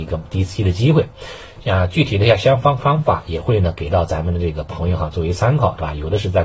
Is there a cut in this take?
no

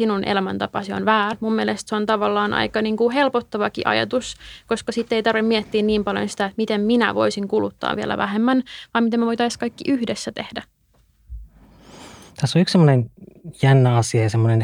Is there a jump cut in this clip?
yes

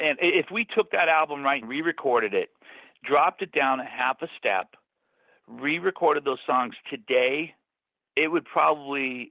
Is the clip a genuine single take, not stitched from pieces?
no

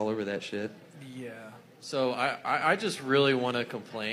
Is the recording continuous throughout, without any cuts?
yes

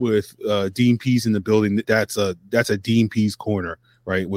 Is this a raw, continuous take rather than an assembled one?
no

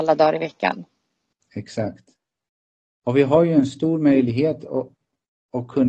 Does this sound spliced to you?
no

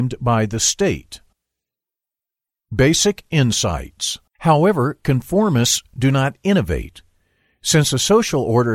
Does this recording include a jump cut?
yes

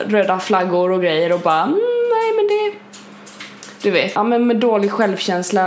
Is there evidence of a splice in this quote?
yes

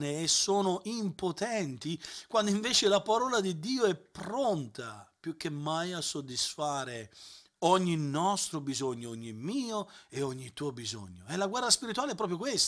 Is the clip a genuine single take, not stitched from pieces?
yes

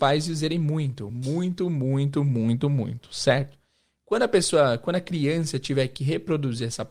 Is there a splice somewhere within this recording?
no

